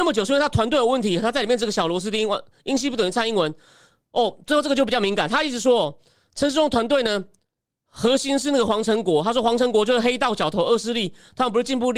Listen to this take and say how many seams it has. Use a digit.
1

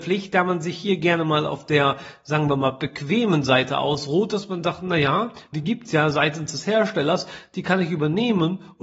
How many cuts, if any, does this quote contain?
1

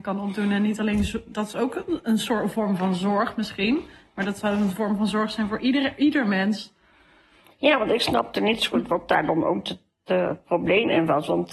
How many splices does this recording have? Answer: 0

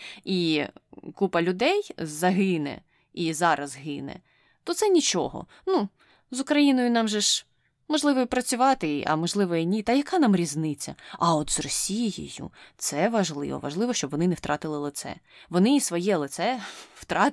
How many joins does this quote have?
0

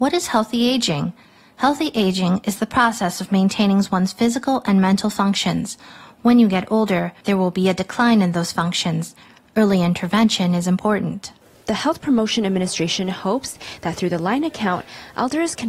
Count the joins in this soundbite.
0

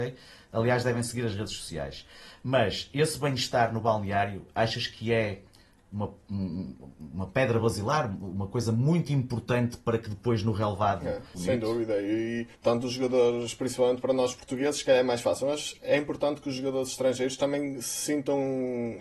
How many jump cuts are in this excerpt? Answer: 2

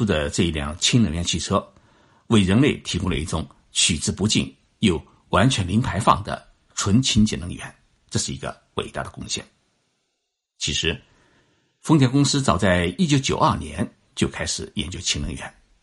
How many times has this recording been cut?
0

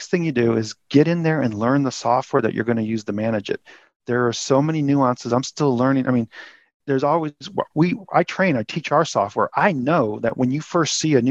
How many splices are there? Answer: 0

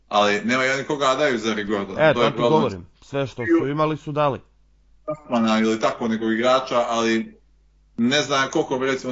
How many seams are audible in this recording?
0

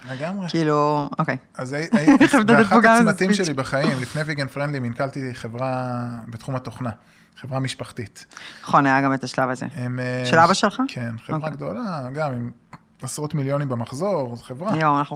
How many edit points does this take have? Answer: 0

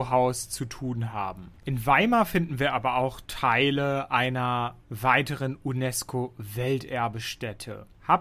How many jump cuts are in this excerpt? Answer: 1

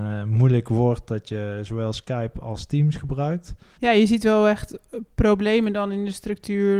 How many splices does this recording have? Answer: 1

